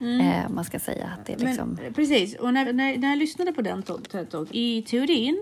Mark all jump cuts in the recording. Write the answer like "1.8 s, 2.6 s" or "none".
2.6 s, 4.5 s